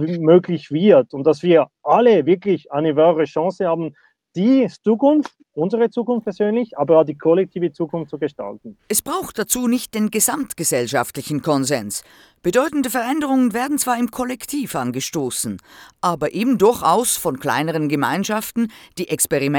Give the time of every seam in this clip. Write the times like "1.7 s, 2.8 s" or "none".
none